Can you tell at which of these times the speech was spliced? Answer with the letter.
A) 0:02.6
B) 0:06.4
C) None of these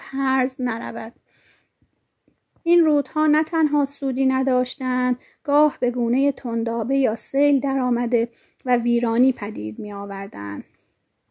A